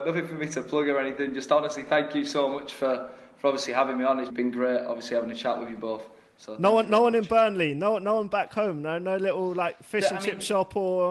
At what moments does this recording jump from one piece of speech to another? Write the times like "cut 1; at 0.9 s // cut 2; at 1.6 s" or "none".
cut 1; at 4.3 s